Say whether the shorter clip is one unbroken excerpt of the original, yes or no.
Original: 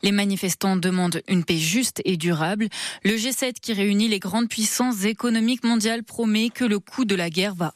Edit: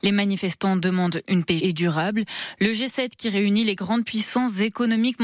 no